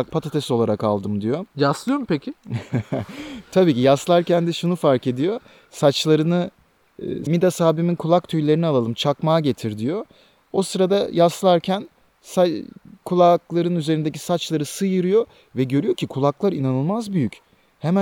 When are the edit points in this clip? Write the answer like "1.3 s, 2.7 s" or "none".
7.3 s